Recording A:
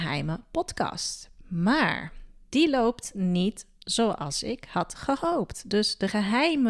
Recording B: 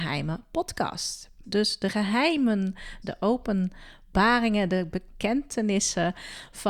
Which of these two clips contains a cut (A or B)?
B